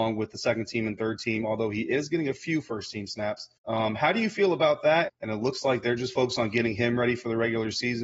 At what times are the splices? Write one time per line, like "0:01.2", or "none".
0:03.6
0:05.1